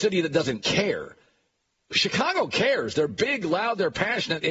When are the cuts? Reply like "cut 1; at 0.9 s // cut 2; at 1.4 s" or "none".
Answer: none